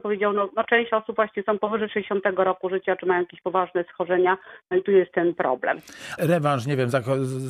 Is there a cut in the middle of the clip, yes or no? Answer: yes